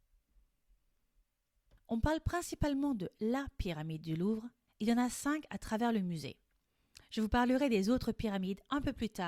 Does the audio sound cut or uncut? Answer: cut